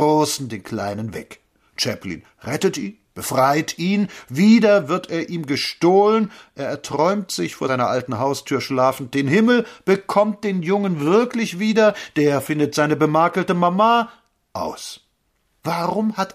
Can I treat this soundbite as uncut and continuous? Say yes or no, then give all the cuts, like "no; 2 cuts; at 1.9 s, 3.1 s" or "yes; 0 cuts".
yes; 0 cuts